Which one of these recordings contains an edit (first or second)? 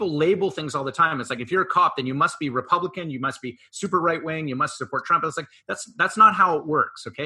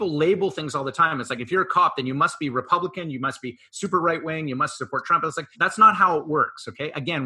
second